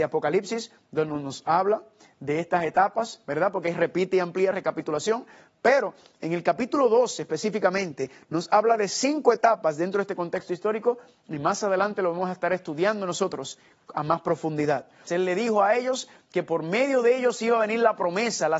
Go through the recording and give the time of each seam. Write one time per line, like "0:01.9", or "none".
0:04.5
0:15.1